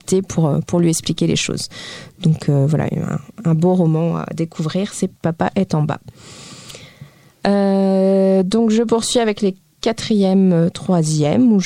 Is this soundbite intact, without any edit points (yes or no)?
yes